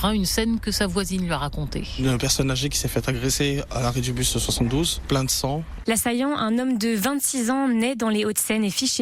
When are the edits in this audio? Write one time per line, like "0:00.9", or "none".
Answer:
0:05.8

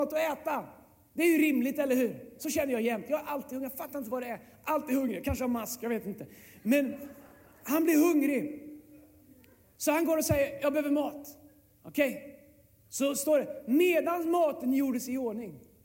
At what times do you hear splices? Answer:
none

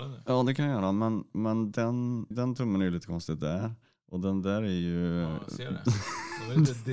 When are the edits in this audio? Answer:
0:02.3

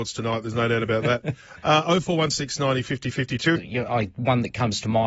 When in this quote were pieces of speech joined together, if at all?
0:03.6

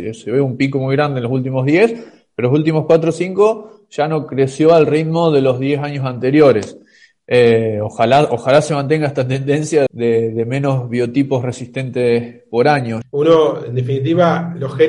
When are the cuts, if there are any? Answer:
0:09.9
0:13.0

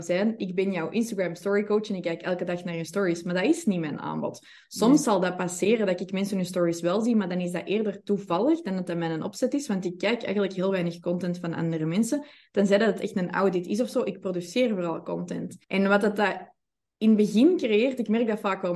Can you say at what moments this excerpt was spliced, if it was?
0:15.6

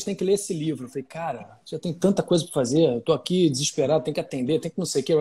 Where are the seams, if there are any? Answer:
none

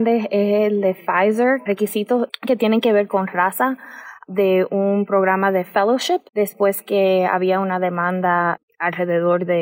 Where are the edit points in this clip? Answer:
0:01.7
0:06.3

